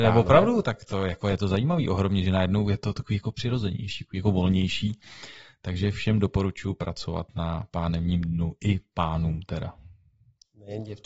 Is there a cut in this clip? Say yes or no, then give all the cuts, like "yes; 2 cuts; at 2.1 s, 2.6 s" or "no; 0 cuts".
no; 0 cuts